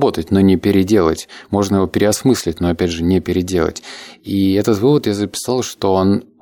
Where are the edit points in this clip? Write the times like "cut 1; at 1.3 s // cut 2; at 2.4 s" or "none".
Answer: none